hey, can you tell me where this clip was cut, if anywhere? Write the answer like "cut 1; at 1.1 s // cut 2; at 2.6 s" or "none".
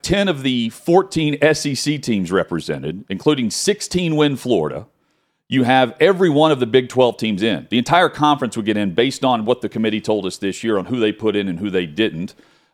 none